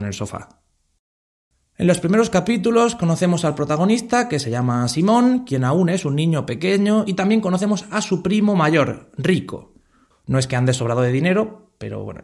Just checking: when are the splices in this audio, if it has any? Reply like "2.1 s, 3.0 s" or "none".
10.1 s